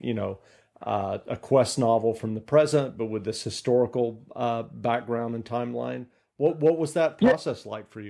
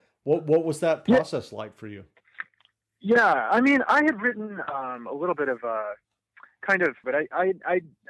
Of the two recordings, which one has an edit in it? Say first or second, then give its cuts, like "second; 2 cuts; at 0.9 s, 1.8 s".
second; 1 cut; at 7.0 s